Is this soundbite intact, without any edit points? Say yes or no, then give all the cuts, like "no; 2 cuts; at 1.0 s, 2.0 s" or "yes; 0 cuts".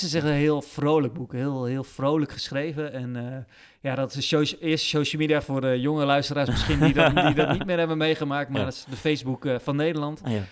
yes; 0 cuts